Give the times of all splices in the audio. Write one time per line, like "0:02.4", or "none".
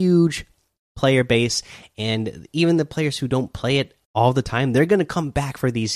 0:04.0